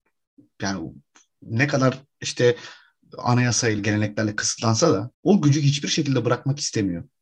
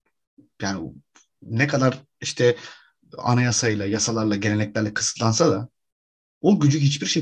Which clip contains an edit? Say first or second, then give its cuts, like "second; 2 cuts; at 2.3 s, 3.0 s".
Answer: first; 2 cuts; at 3.8 s, 5.1 s